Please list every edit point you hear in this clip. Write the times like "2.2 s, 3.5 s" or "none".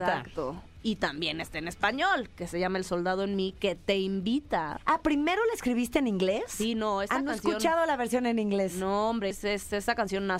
9.3 s